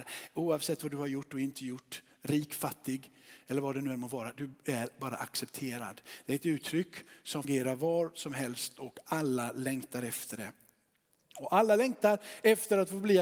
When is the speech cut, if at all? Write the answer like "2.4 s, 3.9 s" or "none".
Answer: none